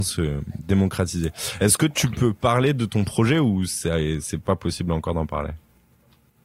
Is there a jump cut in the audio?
no; 0 cuts

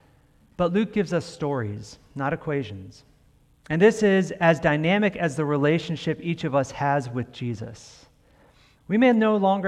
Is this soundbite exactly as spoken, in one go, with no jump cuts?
no; 1 cut; at 8.8 s

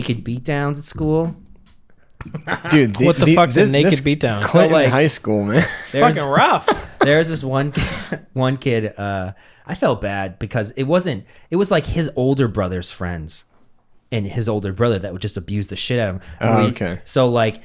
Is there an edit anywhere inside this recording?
no; 0 cuts

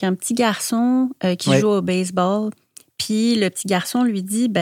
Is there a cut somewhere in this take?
no; 0 cuts

